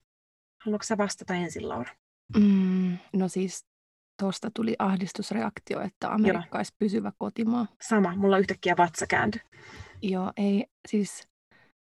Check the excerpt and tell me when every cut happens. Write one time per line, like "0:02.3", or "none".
0:03.1
0:07.8